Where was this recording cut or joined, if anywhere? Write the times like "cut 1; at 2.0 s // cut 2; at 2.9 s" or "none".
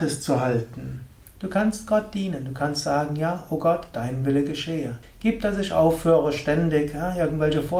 cut 1; at 5.0 s